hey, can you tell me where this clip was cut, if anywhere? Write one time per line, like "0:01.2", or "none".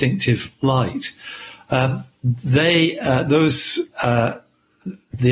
0:01.7

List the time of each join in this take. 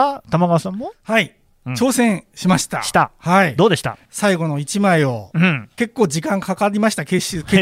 0:04.0
0:05.8

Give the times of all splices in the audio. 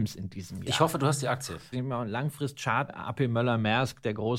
0:01.7
0:02.9

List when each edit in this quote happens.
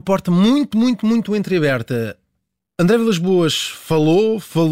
none

